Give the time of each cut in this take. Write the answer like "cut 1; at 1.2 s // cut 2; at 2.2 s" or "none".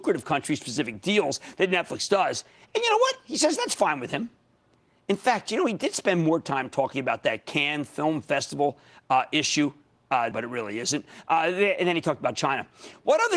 cut 1; at 10.3 s